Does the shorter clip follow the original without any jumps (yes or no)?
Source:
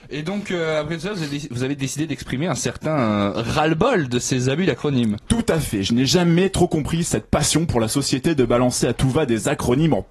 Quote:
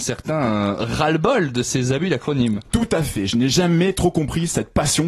yes